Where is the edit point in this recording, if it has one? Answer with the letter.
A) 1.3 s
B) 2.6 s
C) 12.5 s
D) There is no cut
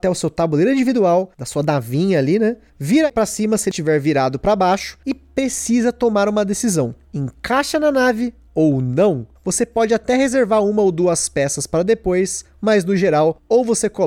D